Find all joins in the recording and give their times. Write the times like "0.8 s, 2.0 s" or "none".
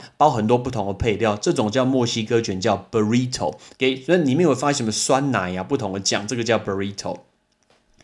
3.7 s